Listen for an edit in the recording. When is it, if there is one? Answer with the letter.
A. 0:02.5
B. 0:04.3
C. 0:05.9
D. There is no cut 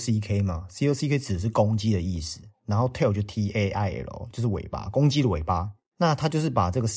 C